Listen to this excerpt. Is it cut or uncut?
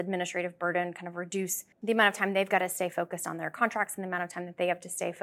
cut